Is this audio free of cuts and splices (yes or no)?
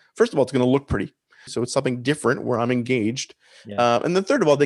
no